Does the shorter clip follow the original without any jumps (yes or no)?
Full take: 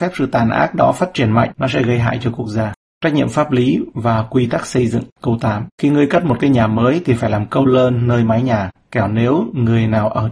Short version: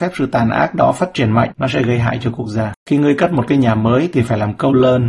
no